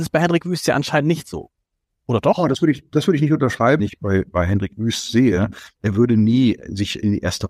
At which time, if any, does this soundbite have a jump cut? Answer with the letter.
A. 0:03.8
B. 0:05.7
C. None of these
A